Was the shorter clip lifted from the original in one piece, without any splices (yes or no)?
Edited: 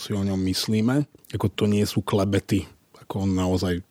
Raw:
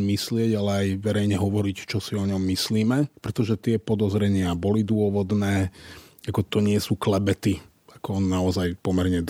no